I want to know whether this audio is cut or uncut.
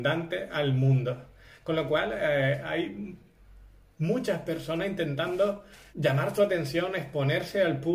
cut